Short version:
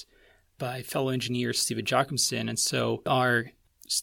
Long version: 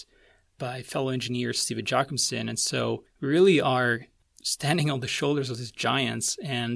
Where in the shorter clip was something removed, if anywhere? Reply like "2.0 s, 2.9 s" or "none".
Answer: 3.1 s